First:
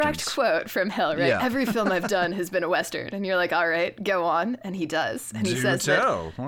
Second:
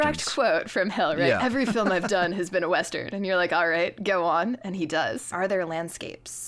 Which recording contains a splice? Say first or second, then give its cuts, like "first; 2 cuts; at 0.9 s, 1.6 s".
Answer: second; 1 cut; at 5.3 s